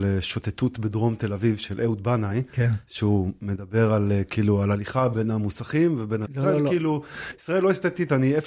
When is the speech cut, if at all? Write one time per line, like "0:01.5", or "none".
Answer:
0:06.2